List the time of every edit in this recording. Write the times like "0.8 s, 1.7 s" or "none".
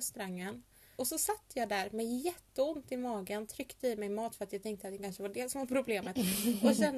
1.0 s